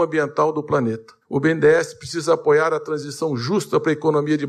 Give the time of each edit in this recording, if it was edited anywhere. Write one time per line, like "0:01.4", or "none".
0:01.2